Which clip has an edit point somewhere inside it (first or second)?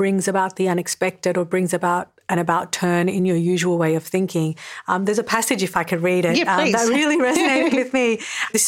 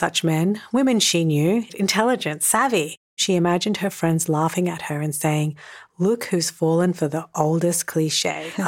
second